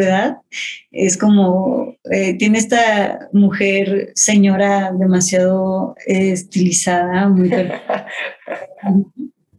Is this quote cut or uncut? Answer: uncut